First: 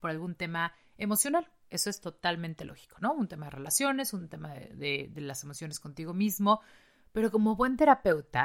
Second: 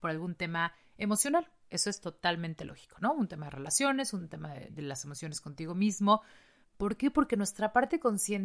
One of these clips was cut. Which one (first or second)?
second